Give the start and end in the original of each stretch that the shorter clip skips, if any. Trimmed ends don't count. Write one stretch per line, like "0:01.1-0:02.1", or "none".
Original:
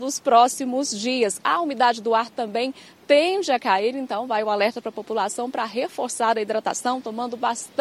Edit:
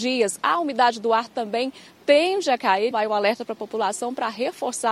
0:03.9-0:04.3